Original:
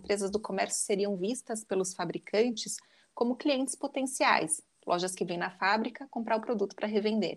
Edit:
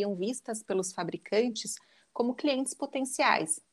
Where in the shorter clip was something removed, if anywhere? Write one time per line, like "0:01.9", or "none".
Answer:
none